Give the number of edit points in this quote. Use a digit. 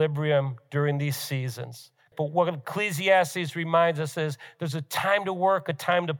1